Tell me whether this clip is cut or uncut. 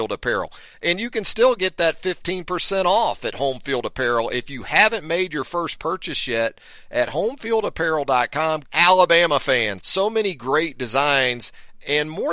cut